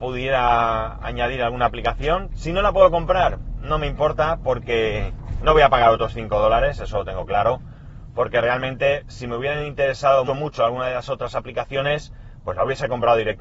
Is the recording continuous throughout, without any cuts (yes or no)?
no